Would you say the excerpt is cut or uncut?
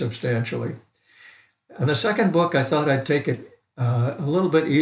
uncut